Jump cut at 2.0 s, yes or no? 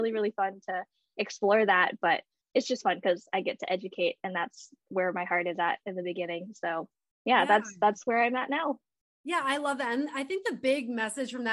no